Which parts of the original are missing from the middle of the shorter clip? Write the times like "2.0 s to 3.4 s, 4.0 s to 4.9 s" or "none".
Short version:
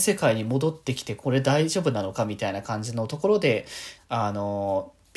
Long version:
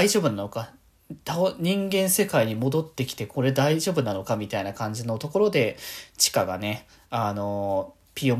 6.1 s to 7.0 s